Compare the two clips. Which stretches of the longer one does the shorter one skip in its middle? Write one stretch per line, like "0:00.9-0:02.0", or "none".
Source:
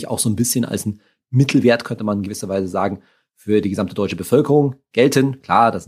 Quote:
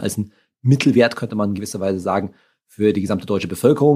none